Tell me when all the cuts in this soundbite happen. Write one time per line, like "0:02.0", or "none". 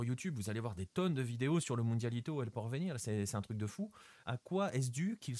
0:04.2